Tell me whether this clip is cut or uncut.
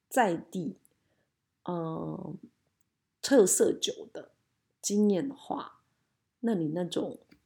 uncut